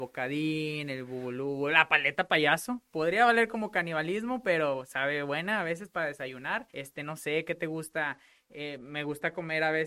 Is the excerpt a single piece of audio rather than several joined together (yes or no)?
no